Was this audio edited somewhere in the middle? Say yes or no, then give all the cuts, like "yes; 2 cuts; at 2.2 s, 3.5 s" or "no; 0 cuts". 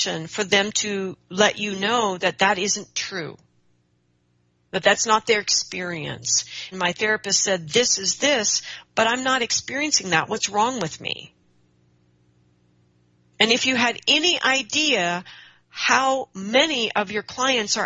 yes; 1 cut; at 6.7 s